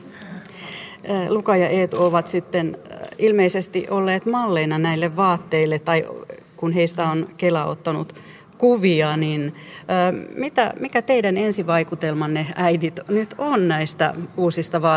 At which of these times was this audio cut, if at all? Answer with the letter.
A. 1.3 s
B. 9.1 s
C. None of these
C